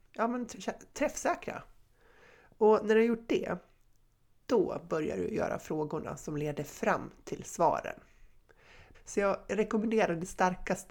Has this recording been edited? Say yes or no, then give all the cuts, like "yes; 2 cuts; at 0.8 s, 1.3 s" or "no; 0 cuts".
yes; 1 cut; at 8.9 s